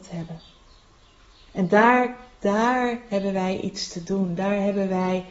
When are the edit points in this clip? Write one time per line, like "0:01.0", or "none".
none